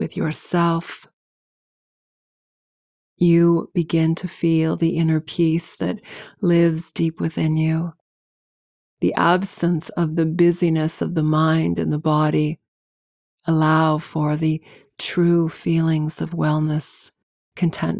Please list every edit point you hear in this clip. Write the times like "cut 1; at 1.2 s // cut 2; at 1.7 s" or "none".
none